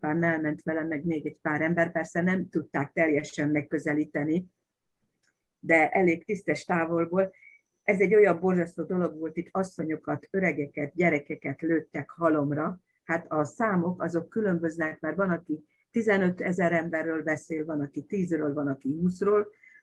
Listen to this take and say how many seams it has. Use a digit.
0